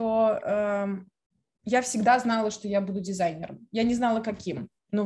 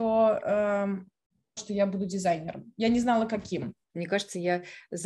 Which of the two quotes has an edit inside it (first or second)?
second